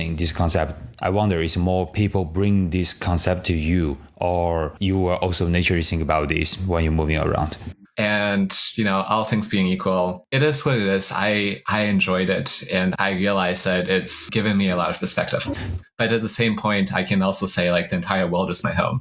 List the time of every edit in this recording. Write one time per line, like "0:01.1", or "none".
0:07.8
0:15.8